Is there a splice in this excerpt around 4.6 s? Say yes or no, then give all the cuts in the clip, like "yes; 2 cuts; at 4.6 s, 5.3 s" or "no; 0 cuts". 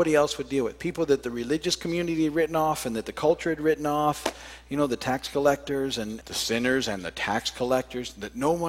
no; 1 cut; at 6.2 s